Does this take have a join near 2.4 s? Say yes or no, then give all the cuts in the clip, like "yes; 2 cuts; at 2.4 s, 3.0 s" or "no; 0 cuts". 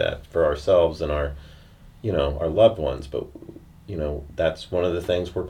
no; 0 cuts